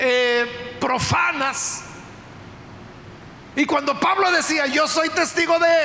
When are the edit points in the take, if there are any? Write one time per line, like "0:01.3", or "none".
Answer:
0:03.5

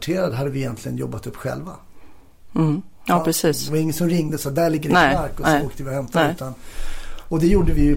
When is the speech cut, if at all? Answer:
none

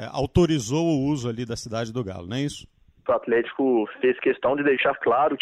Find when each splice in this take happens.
0:03.1

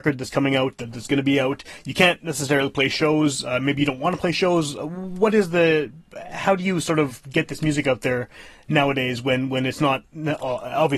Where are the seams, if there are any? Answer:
none

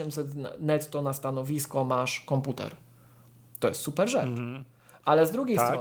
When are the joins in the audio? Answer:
none

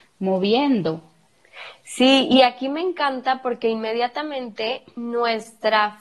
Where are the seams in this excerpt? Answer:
none

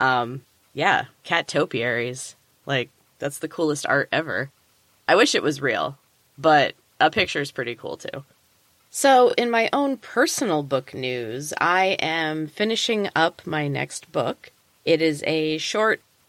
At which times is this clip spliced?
none

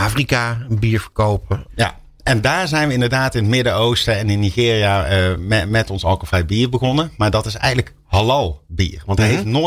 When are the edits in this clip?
0:01.7

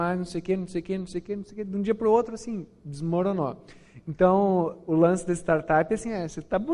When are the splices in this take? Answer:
none

